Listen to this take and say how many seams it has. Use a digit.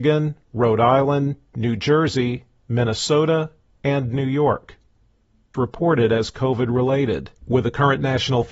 1